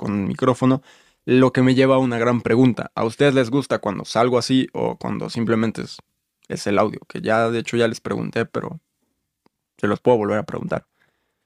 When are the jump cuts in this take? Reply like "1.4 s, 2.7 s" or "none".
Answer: none